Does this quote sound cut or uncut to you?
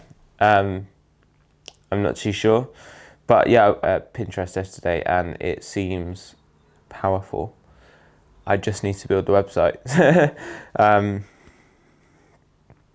cut